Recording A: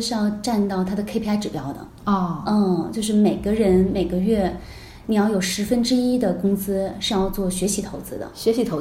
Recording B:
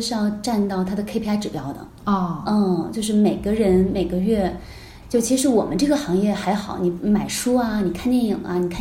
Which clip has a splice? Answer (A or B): B